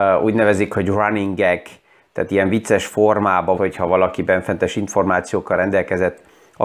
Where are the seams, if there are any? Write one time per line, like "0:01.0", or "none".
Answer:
0:03.6